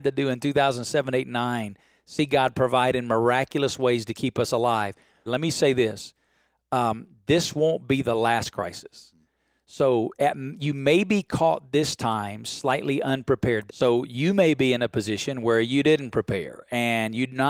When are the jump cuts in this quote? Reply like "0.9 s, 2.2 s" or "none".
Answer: 5.3 s, 13.7 s